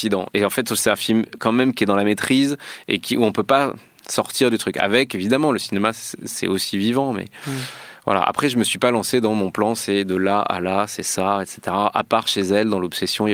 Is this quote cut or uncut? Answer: uncut